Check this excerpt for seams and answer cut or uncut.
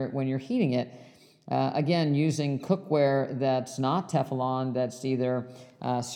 uncut